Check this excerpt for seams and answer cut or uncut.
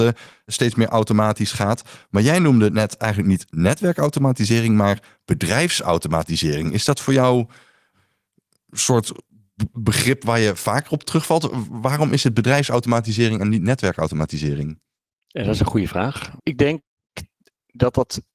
cut